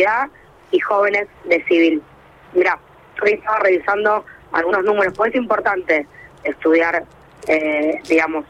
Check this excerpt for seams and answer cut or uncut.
cut